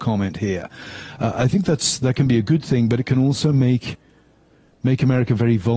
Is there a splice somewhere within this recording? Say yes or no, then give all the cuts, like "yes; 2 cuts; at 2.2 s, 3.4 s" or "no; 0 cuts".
no; 0 cuts